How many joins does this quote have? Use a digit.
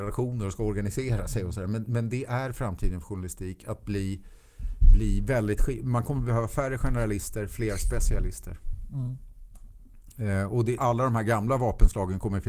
1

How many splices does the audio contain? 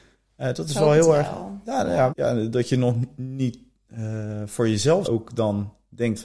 2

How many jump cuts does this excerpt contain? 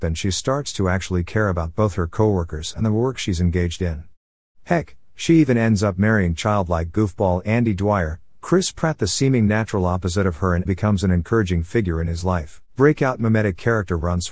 2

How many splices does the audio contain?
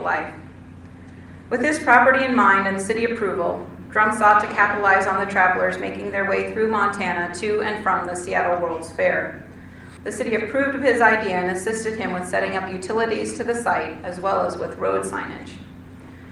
1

